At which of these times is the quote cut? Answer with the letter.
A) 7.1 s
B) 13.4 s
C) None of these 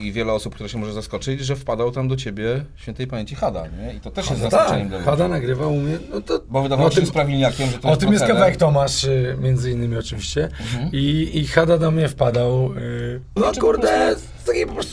B